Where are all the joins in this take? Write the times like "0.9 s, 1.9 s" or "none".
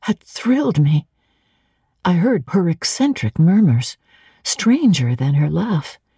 2.5 s